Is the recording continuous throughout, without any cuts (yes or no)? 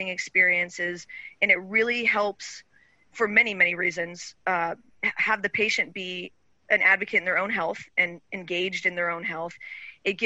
yes